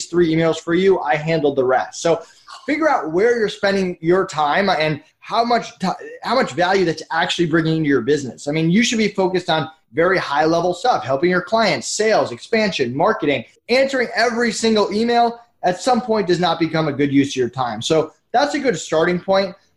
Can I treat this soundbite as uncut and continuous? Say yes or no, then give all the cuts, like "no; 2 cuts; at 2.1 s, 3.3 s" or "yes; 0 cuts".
yes; 0 cuts